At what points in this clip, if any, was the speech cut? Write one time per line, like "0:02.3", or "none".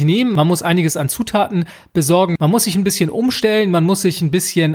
none